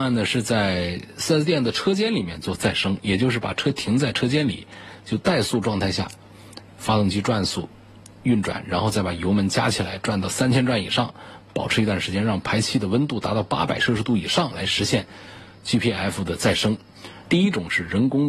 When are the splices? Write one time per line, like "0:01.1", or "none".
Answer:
0:17.3